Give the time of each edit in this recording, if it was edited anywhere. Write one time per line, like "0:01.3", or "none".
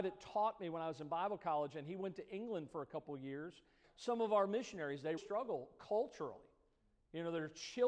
0:03.8
0:05.2